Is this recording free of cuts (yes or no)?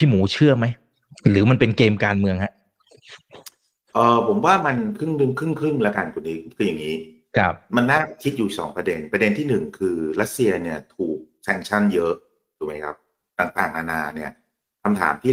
yes